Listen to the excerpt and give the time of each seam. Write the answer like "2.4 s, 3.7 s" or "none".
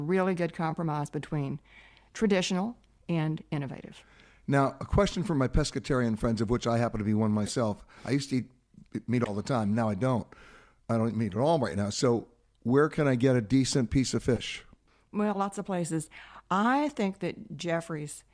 3.0 s